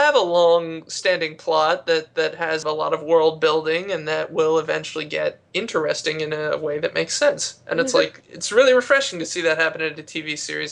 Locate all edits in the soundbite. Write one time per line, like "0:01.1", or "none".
none